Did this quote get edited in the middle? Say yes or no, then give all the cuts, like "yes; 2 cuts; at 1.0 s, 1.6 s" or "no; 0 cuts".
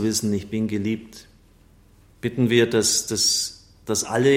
no; 0 cuts